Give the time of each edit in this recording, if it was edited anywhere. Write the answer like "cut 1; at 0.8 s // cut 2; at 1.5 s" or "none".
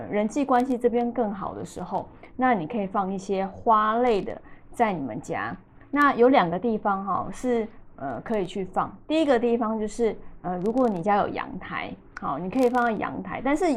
none